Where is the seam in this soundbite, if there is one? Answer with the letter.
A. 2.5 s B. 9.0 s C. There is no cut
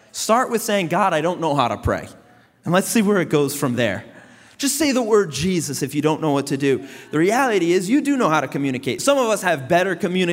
C